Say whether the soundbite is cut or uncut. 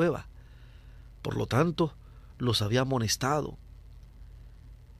uncut